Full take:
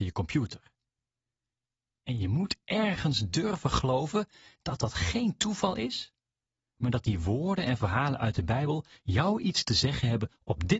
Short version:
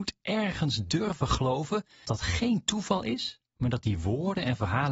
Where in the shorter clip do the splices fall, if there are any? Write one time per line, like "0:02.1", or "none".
0:02.0
0:03.5